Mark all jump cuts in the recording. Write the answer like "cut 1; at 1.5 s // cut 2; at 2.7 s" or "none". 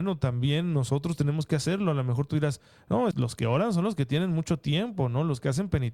cut 1; at 3.1 s